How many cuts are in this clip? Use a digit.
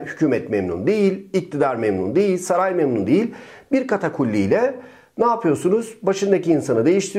0